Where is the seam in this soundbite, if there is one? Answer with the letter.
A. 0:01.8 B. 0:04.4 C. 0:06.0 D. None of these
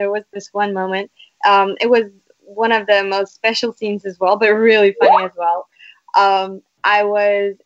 D